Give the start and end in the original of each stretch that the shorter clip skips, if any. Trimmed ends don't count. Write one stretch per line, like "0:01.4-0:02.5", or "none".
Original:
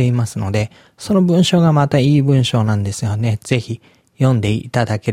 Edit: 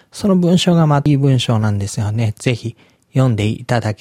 0:01.9-0:02.1